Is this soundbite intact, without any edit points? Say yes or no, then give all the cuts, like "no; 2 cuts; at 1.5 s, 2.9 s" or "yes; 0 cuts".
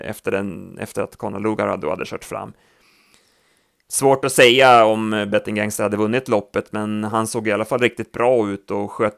yes; 0 cuts